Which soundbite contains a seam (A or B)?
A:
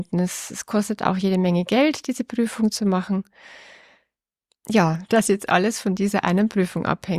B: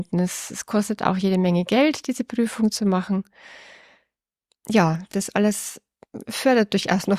A